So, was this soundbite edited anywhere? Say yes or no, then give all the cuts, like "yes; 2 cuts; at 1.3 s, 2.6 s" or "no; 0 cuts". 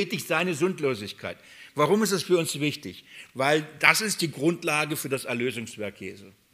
no; 0 cuts